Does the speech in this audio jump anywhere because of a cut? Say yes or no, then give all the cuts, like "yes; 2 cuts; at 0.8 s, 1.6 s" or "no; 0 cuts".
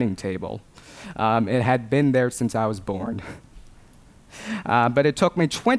no; 0 cuts